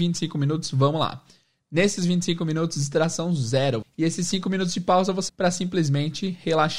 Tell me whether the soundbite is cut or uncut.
cut